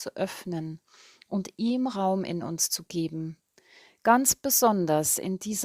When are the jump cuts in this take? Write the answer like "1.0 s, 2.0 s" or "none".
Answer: none